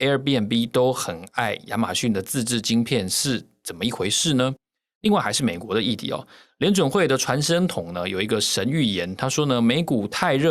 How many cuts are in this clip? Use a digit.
0